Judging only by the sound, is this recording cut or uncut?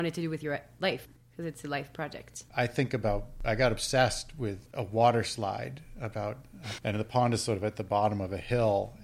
cut